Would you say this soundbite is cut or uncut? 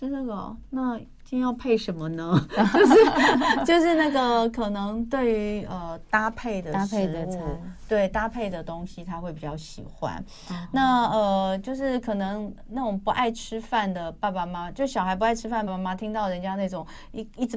cut